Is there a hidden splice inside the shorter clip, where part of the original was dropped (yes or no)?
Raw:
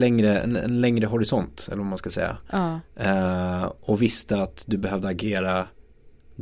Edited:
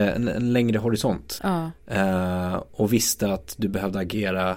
yes